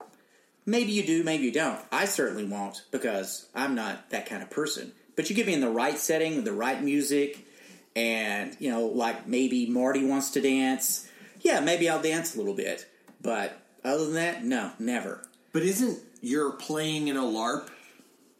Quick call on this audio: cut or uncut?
uncut